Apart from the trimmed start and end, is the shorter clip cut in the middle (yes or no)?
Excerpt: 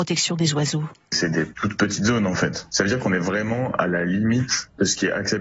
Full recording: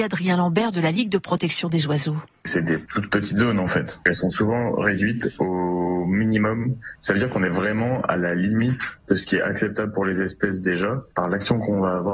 yes